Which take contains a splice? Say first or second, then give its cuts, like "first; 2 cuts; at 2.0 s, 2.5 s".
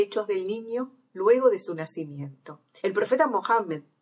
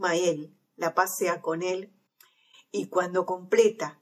first; 1 cut; at 2.8 s